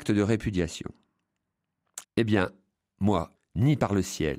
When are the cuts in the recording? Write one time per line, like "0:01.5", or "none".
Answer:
0:02.0
0:03.3